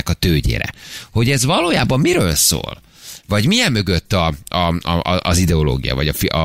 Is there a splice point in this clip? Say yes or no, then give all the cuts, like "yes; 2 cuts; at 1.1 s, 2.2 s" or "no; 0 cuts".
no; 0 cuts